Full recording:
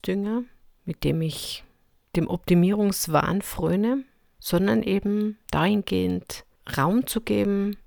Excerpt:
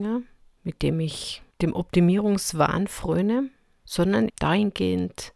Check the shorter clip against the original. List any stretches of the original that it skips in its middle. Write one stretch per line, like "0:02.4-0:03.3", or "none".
0:01.7-0:02.1
0:04.8-0:05.4